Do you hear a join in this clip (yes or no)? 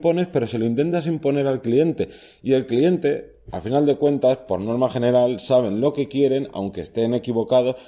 no